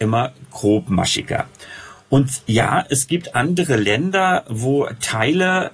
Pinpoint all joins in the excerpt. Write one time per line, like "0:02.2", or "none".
none